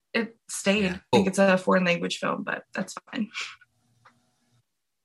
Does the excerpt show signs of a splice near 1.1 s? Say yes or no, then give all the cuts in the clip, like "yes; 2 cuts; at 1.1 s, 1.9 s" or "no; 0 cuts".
yes; 1 cut; at 1.1 s